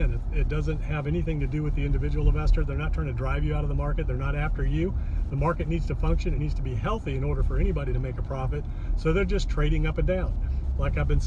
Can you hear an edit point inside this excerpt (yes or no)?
yes